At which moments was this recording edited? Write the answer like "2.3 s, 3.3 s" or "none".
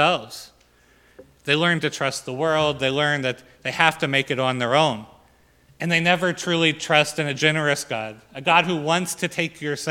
none